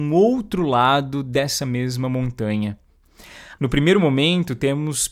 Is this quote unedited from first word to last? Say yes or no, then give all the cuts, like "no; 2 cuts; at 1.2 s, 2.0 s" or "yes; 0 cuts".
no; 1 cut; at 3.5 s